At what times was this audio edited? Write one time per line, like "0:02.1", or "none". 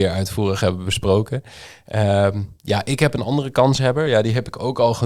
none